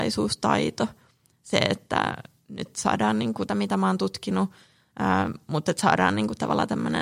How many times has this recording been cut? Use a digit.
1